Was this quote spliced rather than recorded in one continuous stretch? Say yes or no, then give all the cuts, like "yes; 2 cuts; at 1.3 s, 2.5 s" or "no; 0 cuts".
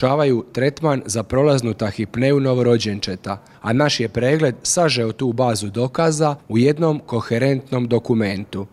no; 0 cuts